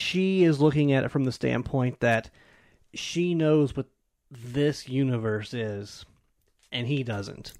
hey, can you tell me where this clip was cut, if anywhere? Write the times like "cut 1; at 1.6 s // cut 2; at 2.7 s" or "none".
none